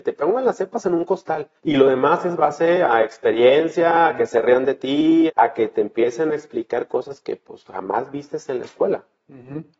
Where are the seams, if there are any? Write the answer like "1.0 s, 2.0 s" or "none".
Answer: 1.6 s, 5.3 s